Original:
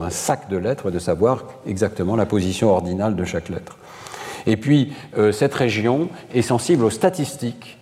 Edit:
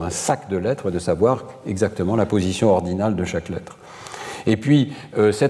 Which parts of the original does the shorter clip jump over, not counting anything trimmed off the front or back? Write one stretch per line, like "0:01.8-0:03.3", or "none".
none